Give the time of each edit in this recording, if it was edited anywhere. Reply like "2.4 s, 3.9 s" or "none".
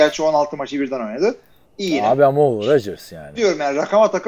1.6 s, 3.3 s